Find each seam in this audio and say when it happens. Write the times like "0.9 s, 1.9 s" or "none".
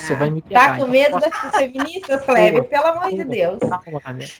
none

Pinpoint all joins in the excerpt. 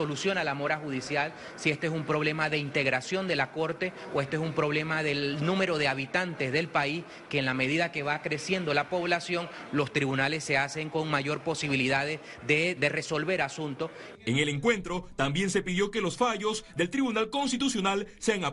12.8 s

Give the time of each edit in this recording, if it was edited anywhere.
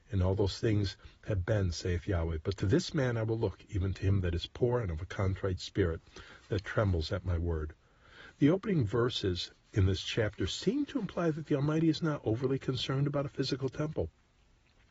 none

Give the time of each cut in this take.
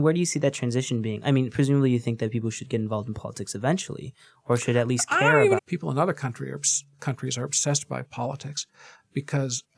5.6 s

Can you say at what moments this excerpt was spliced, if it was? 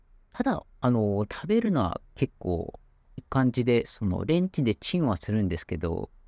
3.2 s

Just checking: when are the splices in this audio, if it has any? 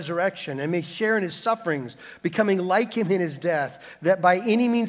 none

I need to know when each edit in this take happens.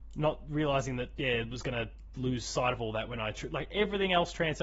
none

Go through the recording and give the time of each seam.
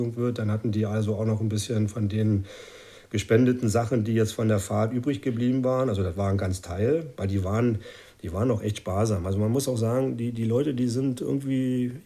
none

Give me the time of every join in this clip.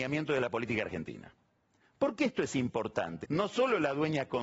3.2 s

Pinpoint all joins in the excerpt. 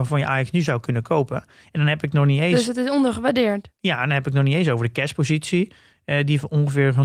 none

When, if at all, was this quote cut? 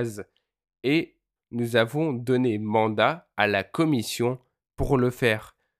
1.4 s

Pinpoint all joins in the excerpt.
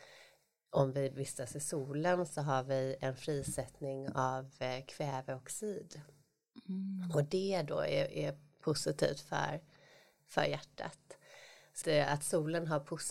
11.8 s

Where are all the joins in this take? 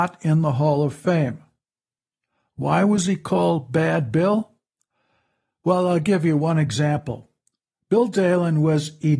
none

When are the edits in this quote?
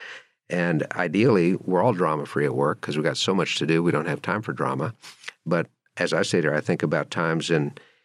none

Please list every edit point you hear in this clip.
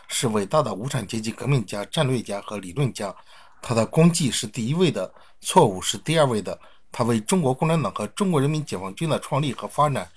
none

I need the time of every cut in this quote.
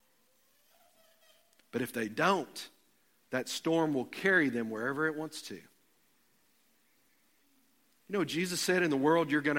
none

